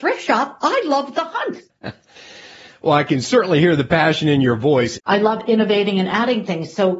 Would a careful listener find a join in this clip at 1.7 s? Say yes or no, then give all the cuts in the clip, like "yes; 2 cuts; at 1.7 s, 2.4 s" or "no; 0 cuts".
yes; 2 cuts; at 1.7 s, 5.0 s